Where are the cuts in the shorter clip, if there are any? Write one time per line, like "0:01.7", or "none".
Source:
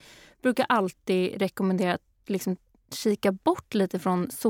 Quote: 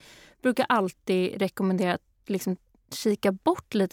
none